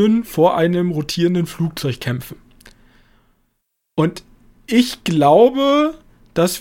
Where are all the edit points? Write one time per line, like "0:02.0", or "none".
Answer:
none